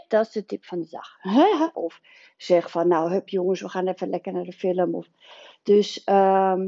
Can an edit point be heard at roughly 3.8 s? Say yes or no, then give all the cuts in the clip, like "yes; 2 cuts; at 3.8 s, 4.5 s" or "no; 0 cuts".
no; 1 cut; at 1.7 s